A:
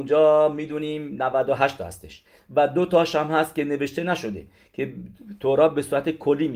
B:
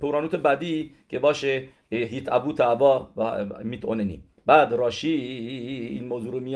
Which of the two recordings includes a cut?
B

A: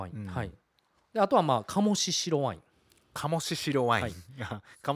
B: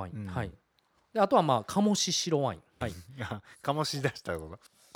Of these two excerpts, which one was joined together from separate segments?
B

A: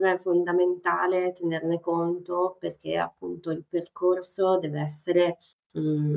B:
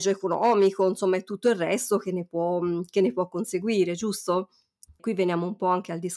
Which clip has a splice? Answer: B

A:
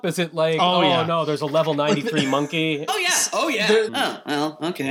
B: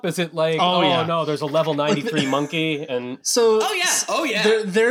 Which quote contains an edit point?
A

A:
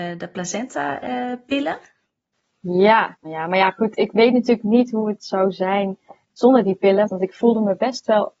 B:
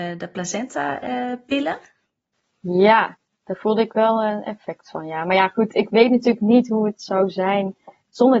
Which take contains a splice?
A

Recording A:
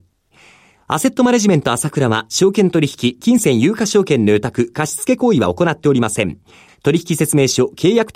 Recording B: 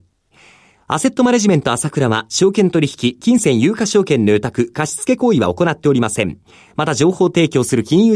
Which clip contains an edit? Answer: A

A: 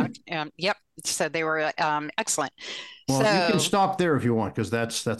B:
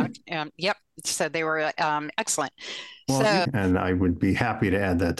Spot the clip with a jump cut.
B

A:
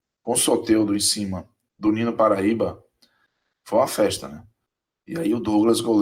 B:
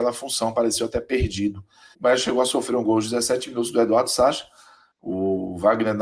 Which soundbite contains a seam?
B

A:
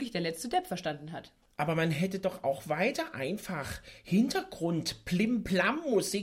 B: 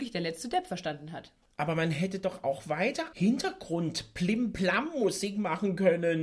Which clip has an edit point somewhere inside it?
B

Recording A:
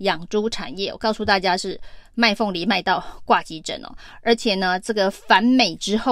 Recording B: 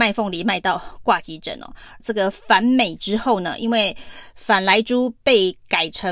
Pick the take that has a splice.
B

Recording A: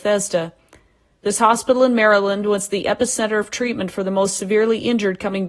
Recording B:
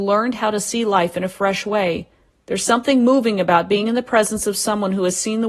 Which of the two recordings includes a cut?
B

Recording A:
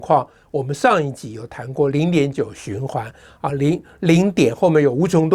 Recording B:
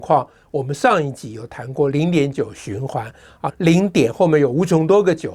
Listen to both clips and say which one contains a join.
B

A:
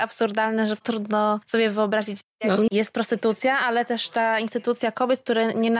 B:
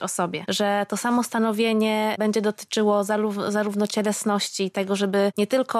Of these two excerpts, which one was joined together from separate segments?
A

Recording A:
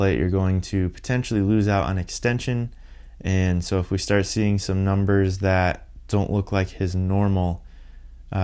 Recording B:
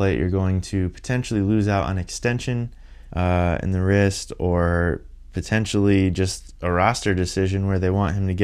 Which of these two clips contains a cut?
B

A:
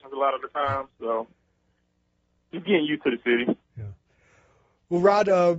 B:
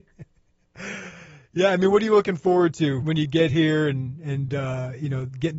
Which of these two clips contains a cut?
B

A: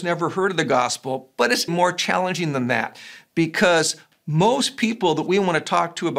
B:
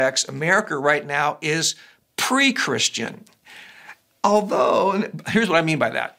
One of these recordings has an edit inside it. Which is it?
A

